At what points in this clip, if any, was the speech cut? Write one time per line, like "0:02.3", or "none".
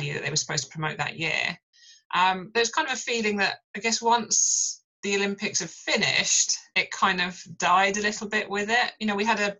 0:03.6
0:04.9